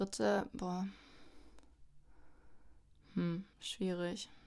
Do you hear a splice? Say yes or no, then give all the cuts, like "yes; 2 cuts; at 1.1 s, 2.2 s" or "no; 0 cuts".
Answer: yes; 1 cut; at 3.5 s